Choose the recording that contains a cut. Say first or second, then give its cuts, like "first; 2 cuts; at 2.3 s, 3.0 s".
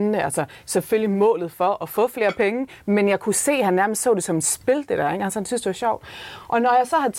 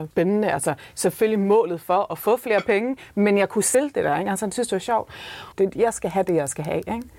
second; 2 cuts; at 3.7 s, 5.5 s